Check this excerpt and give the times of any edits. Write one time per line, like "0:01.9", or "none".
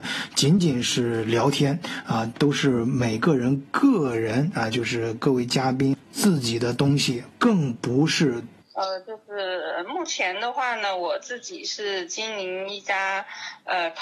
0:07.3
0:08.6